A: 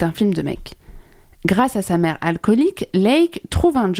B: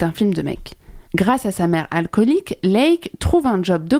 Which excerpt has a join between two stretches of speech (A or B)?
B